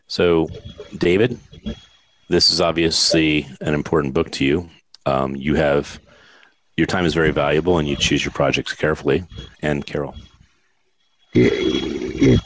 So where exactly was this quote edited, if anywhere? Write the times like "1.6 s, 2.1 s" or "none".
9.5 s